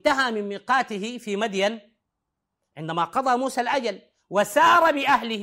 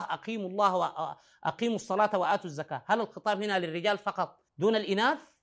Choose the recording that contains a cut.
second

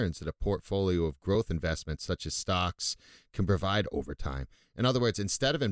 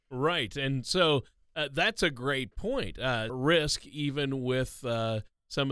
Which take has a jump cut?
second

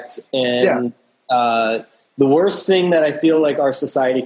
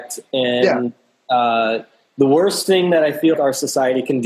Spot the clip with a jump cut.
second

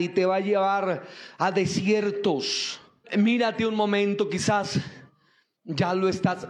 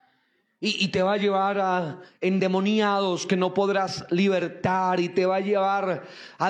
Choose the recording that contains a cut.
first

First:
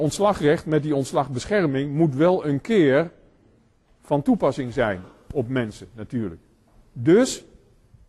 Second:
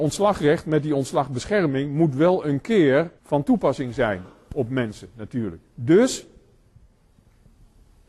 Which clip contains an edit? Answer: second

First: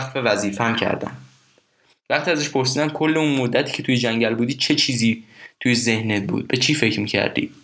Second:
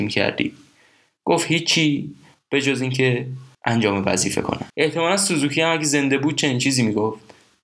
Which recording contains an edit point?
second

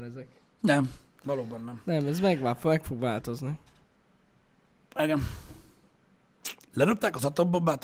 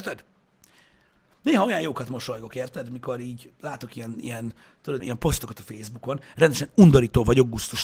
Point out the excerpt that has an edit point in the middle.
second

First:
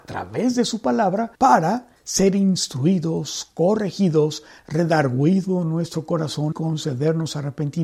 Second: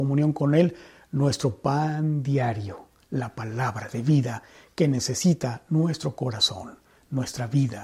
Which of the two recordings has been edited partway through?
first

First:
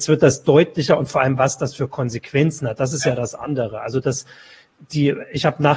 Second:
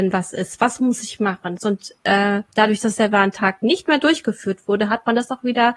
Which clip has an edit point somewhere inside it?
second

